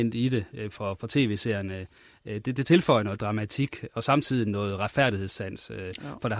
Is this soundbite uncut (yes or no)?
yes